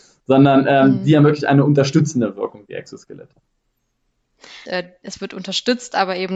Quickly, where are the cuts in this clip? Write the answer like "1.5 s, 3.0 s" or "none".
4.7 s